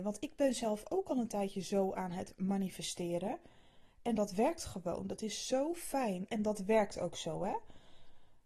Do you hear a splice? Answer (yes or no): yes